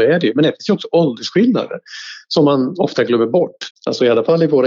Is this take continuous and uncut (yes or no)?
no